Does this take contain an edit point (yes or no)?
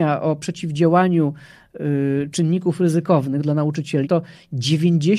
yes